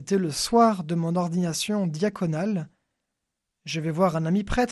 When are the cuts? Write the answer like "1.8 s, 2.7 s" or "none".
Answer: none